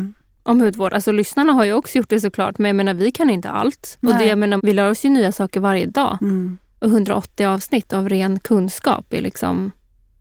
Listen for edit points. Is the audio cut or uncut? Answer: cut